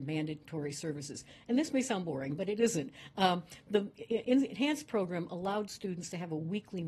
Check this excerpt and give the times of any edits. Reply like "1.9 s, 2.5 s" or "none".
none